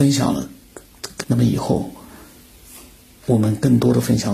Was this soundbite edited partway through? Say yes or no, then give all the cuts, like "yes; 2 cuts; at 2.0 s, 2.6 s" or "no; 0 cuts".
yes; 1 cut; at 1.2 s